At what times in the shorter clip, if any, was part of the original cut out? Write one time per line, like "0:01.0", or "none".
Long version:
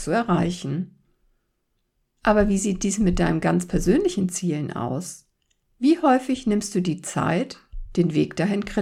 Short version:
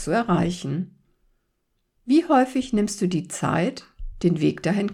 0:02.0